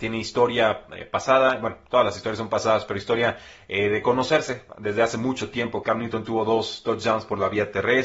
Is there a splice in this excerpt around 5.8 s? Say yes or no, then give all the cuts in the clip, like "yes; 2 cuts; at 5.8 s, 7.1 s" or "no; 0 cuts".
yes; 1 cut; at 5.8 s